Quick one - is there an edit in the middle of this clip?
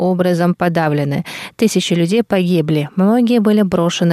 no; 0 cuts

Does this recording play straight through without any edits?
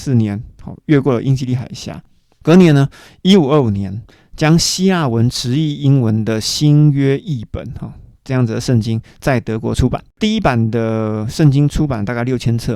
no; 1 cut; at 10.1 s

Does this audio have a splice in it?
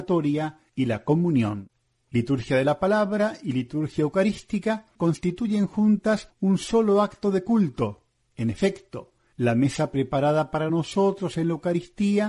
no; 0 cuts

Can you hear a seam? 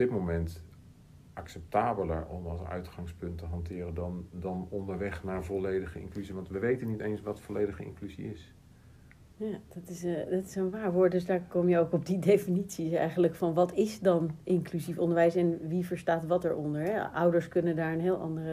no; 0 cuts

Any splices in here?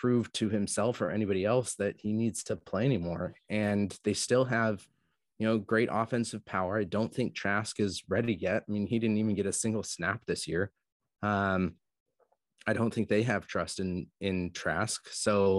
no; 0 cuts

